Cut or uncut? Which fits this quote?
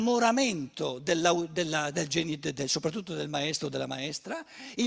cut